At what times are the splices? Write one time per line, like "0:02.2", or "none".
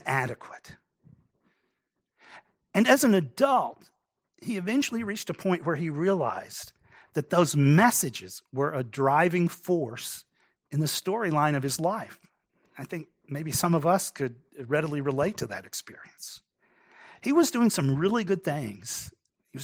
none